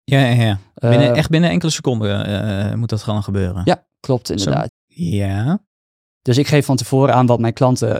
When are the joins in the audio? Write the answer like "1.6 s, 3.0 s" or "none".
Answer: 4.7 s